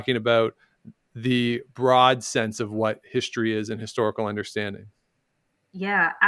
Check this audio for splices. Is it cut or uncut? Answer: uncut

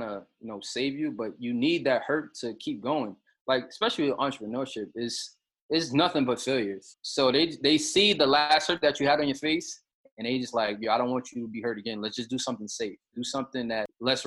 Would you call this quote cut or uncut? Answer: cut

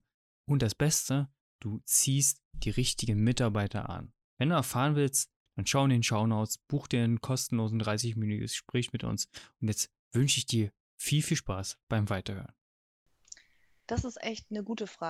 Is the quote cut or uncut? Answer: cut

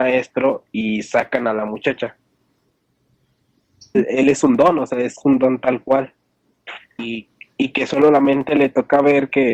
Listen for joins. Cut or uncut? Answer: cut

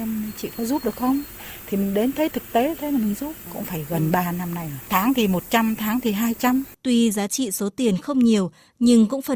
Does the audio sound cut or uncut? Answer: cut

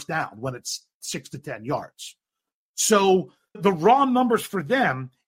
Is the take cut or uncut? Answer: cut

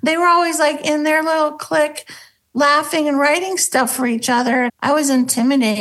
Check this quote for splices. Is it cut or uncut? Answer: cut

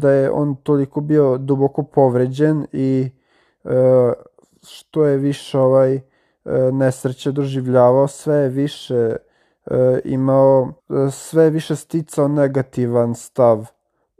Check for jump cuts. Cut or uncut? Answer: cut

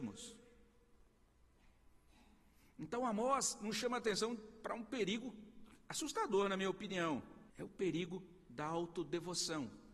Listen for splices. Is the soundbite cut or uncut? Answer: cut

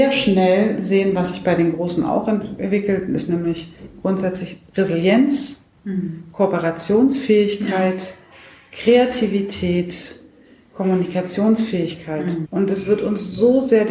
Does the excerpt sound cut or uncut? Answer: cut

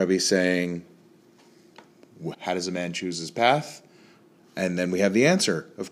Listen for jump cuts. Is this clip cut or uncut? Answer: cut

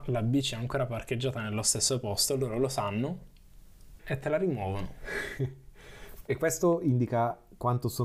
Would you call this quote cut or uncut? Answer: cut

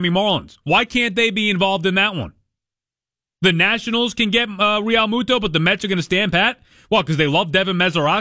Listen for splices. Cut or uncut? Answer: uncut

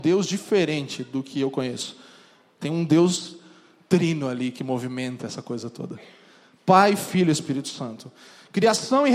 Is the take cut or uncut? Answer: uncut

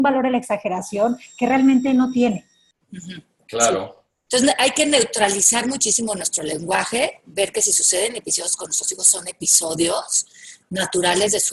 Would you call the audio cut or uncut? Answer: uncut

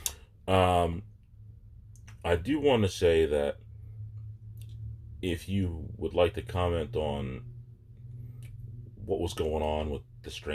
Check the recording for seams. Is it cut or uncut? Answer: uncut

